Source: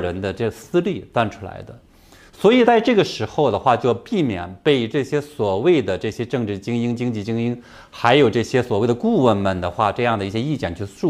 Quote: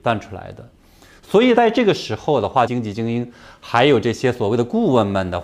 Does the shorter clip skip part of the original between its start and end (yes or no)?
yes